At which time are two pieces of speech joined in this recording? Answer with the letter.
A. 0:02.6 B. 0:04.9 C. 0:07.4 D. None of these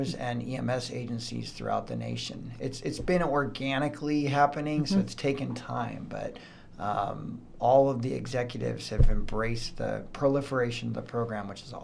D